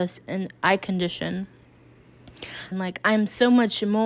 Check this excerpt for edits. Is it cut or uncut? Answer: cut